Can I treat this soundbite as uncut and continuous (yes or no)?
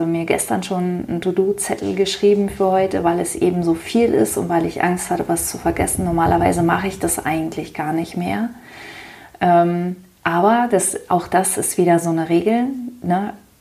yes